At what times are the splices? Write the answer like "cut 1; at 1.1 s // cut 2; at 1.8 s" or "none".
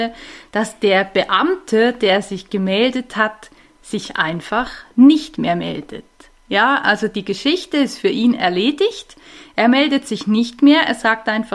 none